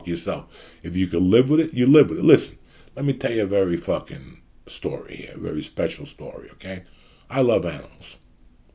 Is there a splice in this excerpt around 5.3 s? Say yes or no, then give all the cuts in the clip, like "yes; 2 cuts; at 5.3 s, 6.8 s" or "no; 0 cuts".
no; 0 cuts